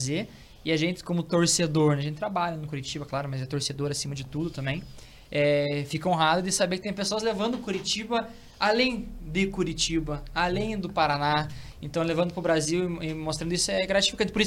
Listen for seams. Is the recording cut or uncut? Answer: uncut